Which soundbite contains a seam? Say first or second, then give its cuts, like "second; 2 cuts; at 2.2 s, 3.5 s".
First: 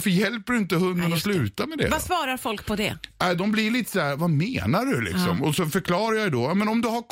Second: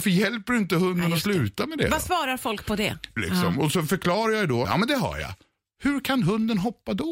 second; 2 cuts; at 3.2 s, 4.6 s